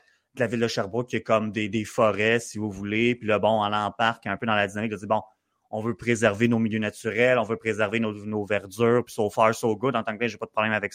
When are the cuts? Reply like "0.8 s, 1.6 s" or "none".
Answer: none

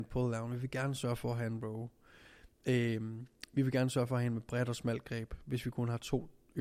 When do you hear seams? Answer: none

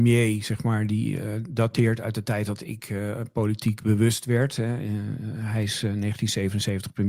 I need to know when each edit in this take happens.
none

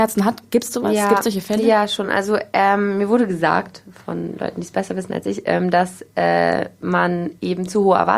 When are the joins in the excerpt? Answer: none

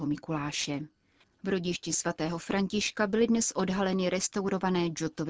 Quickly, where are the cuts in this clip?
1.2 s

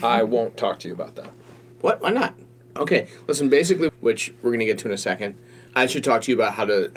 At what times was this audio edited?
2.8 s, 3.9 s, 5.7 s

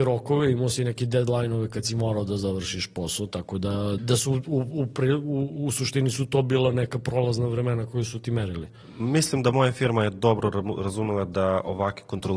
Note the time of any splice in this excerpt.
4.0 s

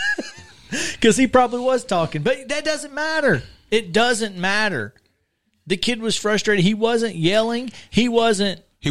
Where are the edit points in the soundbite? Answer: none

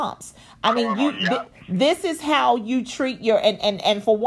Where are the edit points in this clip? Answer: none

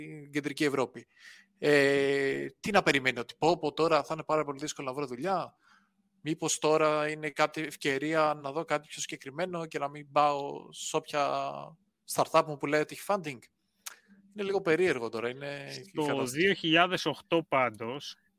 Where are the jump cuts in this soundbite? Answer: 8.4 s

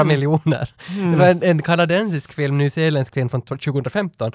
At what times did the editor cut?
none

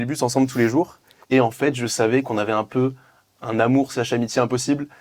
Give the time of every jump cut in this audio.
1.2 s

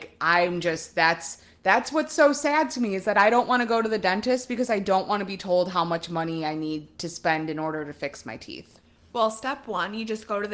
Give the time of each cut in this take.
none

